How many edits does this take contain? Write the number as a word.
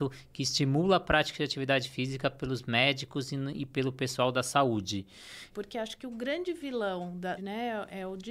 two